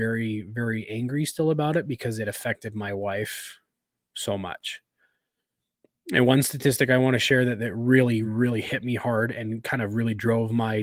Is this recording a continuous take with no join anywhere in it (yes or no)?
no